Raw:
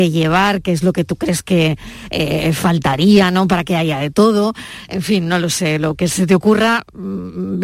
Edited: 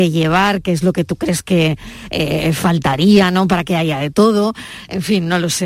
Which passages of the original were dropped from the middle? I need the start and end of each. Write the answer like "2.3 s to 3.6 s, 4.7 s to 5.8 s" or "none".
none